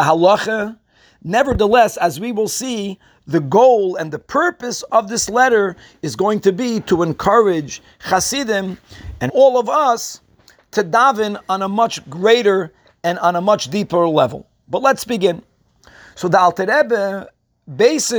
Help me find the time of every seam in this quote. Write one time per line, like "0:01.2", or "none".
0:09.3

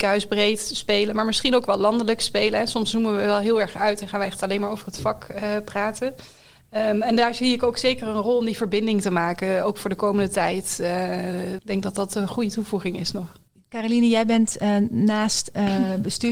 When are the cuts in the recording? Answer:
0:11.6

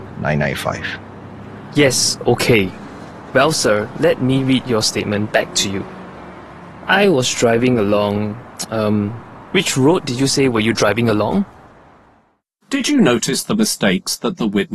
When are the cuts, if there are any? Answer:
none

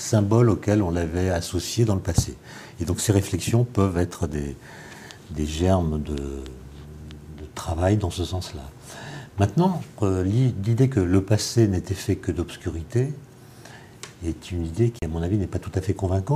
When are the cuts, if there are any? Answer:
none

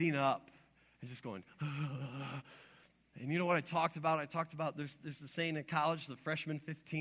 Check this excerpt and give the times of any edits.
none

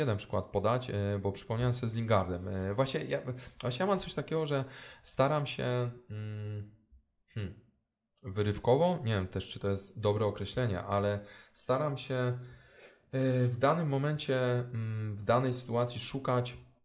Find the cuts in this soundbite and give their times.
none

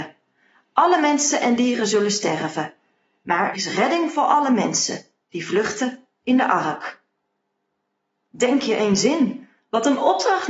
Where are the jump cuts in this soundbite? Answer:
0:03.5

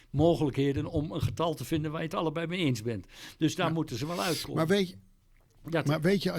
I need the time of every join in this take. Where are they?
none

